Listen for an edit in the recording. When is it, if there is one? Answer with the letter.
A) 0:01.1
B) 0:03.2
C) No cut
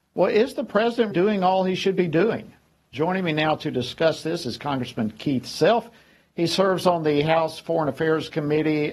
A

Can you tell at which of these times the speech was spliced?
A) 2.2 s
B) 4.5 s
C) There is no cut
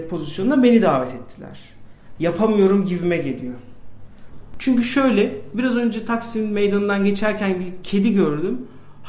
A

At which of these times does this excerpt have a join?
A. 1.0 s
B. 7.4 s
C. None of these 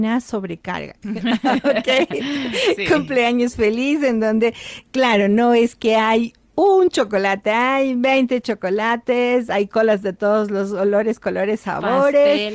A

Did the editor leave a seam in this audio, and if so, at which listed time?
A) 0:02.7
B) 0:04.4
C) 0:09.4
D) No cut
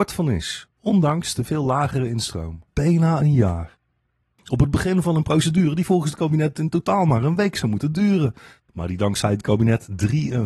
A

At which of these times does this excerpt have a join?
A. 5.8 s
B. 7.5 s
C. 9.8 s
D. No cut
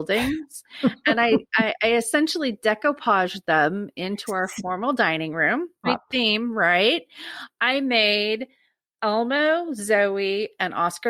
A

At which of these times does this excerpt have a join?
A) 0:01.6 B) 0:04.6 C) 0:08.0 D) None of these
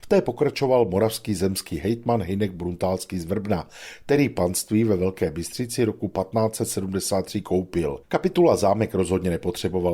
C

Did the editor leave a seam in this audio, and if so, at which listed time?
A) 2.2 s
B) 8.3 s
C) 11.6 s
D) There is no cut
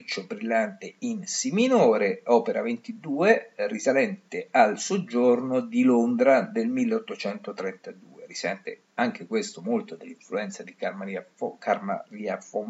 D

